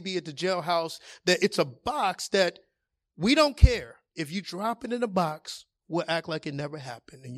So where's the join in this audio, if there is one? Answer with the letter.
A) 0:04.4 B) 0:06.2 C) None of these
A